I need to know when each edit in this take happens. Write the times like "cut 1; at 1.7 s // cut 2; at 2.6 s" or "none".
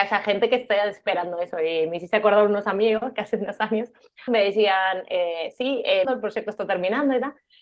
cut 1; at 4.3 s // cut 2; at 6.0 s